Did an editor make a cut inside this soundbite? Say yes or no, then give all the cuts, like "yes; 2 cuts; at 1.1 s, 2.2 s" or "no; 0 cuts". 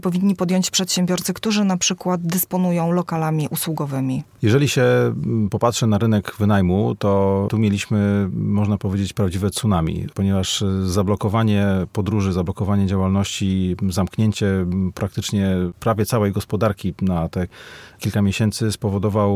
no; 0 cuts